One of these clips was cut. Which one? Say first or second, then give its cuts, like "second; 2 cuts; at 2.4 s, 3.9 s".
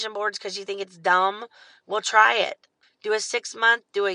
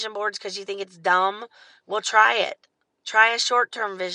first; 1 cut; at 2.8 s